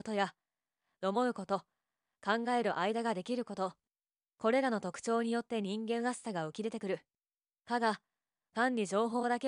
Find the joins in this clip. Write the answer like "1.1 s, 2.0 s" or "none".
none